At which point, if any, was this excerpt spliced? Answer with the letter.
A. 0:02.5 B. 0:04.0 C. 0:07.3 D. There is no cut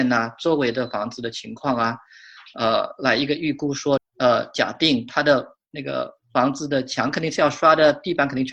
B